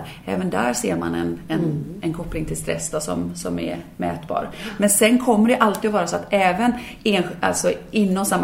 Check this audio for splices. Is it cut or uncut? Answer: uncut